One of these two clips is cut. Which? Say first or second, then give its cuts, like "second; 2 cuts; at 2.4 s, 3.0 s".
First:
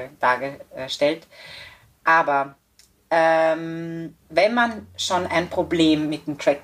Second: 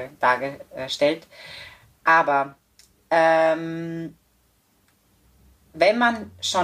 first; 1 cut; at 4.2 s